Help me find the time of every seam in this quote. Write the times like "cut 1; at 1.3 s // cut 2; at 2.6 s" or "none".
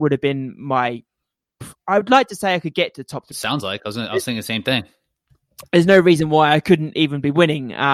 cut 1; at 3.3 s

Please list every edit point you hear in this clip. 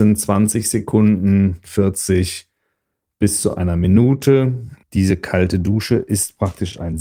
cut 1; at 1.6 s // cut 2; at 4.8 s

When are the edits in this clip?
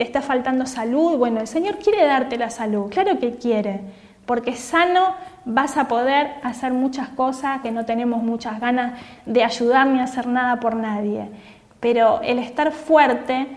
cut 1; at 7.6 s

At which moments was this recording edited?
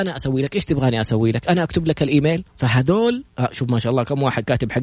cut 1; at 2.5 s

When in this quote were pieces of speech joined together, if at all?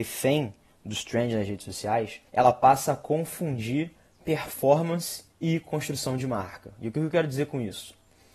cut 1; at 2.3 s // cut 2; at 5.3 s

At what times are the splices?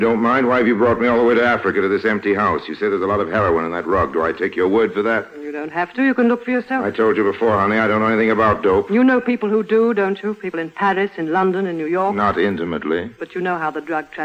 none

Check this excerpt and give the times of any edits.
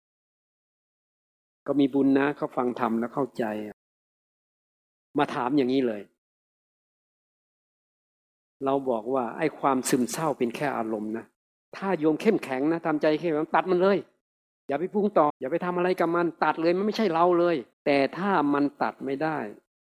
cut 1; at 15.3 s // cut 2; at 17.7 s

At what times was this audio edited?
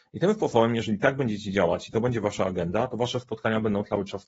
none

